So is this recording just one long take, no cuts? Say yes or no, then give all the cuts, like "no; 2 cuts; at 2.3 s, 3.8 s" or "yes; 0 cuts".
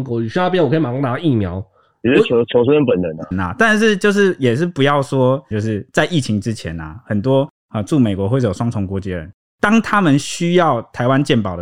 no; 2 cuts; at 3.3 s, 5.5 s